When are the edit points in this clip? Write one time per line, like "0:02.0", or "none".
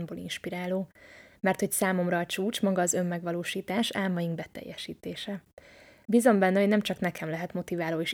0:06.1